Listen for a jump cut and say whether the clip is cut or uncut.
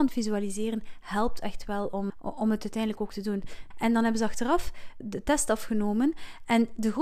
cut